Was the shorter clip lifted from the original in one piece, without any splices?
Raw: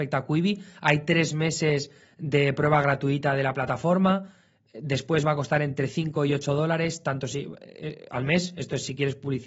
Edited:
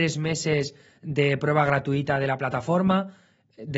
yes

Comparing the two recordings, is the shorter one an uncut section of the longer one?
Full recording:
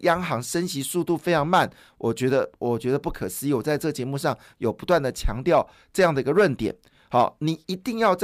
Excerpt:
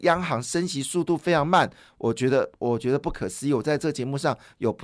yes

